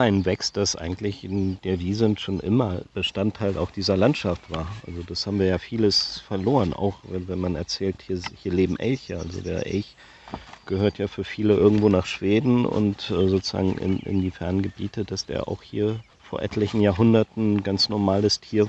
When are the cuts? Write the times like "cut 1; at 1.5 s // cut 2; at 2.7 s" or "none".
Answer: none